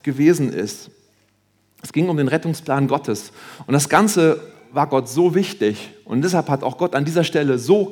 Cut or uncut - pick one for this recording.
uncut